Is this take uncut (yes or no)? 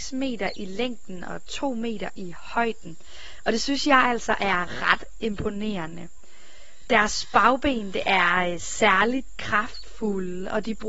yes